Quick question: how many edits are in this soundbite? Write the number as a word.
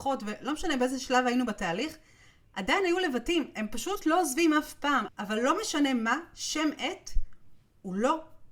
one